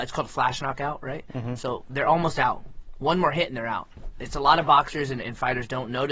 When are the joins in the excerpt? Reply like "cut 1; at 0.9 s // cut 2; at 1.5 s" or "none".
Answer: none

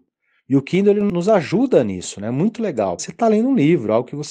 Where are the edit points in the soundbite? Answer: cut 1; at 3.0 s

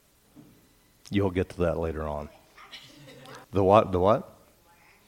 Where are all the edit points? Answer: cut 1; at 3.4 s

